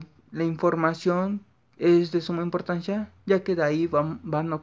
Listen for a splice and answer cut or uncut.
cut